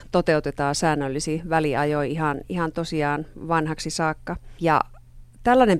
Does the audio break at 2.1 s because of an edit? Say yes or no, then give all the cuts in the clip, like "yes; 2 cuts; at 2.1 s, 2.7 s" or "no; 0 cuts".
no; 1 cut; at 4.6 s